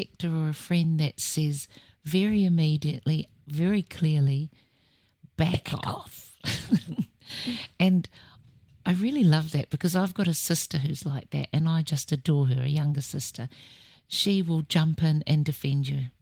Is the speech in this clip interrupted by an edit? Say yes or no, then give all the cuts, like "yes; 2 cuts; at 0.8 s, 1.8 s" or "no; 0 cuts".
no; 0 cuts